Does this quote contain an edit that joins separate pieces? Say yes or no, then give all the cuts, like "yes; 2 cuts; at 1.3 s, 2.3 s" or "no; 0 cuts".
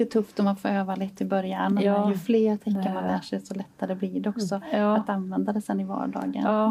no; 0 cuts